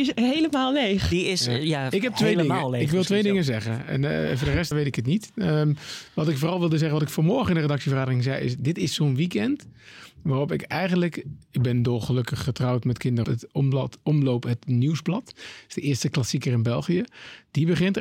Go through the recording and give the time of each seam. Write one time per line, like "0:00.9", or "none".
0:04.7
0:13.2